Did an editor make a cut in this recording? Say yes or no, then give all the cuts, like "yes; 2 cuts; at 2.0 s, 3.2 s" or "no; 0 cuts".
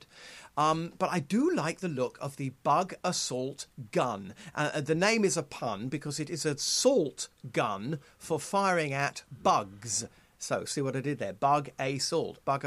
no; 0 cuts